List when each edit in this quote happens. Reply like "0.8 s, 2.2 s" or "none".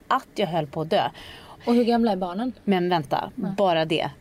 1.6 s